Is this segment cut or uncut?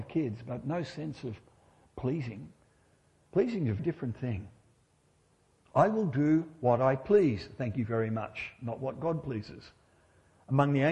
cut